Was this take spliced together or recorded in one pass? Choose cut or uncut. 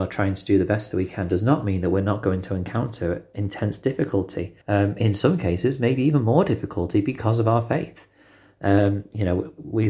cut